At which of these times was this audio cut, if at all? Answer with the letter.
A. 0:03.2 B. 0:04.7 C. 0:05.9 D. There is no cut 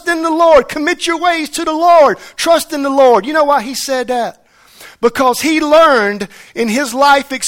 D